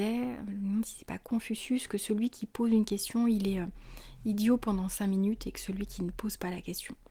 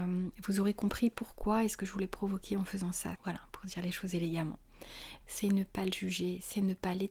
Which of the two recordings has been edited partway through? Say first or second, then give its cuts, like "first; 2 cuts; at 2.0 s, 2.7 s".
second; 2 cuts; at 3.2 s, 5.2 s